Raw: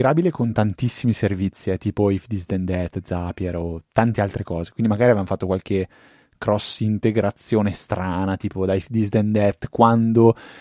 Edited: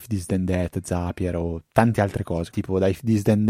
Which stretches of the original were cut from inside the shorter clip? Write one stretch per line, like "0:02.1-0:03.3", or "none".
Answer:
0:04.7-0:08.4